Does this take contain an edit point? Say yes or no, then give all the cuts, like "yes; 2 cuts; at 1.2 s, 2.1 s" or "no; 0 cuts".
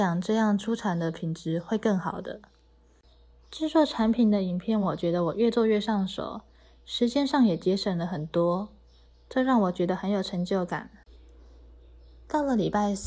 no; 0 cuts